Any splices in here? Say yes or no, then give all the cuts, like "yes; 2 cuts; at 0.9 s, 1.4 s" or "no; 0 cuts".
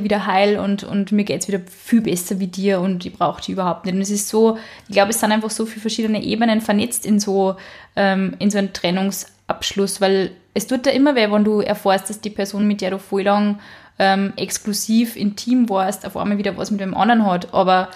no; 0 cuts